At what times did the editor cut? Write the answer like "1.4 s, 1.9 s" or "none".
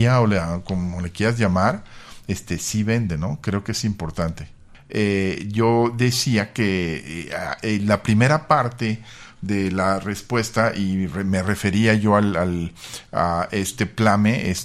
none